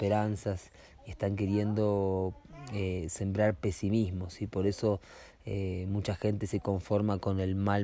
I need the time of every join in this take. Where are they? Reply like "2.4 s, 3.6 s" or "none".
none